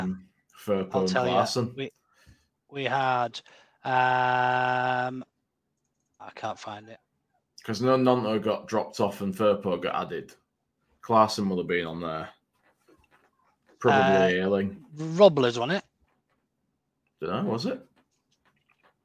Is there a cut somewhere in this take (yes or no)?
yes